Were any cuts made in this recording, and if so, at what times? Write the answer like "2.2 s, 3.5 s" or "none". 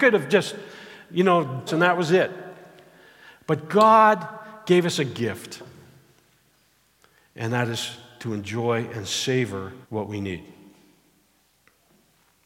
1.7 s, 9.8 s